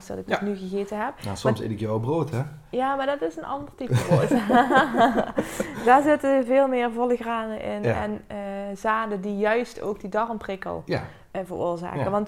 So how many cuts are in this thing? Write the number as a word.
zero